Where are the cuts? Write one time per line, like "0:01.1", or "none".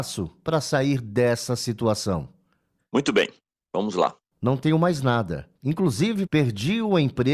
0:04.3
0:06.3